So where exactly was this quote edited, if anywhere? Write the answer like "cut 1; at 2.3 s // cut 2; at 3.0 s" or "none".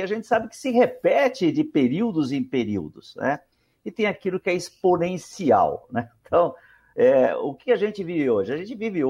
none